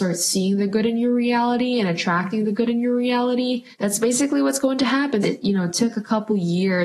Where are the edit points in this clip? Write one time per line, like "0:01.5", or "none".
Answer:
0:03.7
0:05.2